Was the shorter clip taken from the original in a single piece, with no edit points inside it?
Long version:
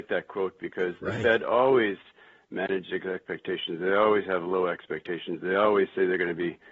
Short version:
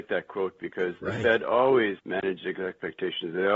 no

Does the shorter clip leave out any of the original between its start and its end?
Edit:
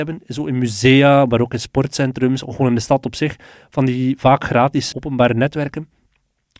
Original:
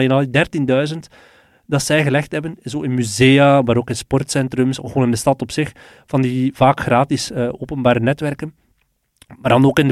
yes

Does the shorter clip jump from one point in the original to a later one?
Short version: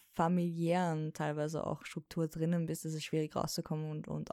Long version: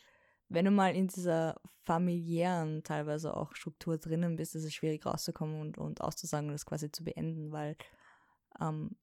no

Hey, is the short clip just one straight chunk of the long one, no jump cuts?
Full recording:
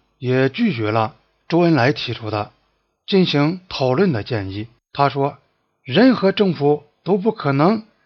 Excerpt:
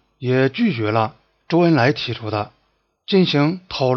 yes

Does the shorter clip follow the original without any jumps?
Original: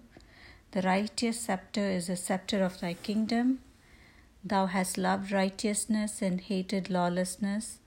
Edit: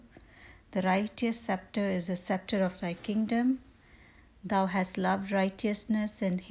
yes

